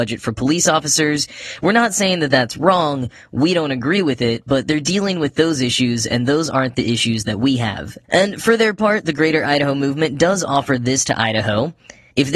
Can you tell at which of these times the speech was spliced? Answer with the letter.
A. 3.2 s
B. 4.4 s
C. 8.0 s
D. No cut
C